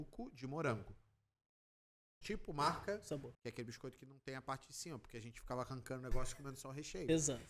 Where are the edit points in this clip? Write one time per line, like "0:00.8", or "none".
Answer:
0:02.2
0:03.3